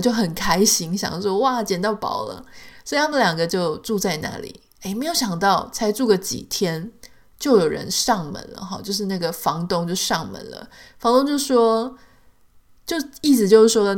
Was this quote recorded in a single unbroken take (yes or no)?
yes